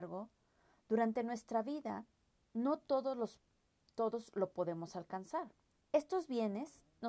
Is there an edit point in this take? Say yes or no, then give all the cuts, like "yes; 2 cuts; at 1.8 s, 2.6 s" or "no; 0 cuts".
yes; 1 cut; at 5.8 s